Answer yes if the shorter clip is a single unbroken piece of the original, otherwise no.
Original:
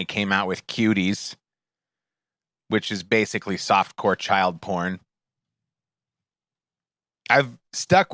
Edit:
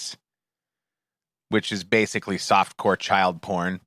yes